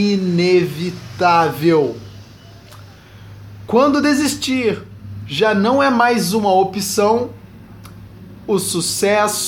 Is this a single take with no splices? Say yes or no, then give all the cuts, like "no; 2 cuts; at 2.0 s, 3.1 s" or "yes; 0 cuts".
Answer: yes; 0 cuts